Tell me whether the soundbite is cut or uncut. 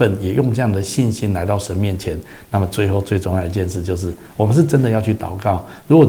uncut